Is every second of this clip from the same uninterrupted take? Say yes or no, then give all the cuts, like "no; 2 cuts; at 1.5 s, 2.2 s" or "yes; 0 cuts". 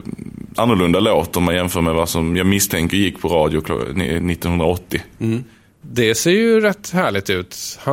no; 1 cut; at 5.8 s